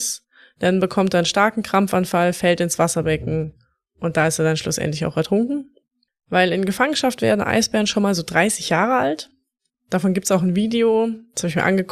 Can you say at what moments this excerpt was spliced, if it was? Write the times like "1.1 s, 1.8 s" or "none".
6.1 s, 9.7 s